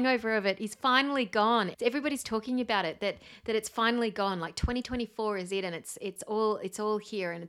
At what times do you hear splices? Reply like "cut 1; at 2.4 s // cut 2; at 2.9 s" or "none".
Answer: cut 1; at 1.7 s